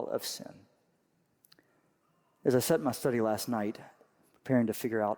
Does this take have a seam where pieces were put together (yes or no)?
no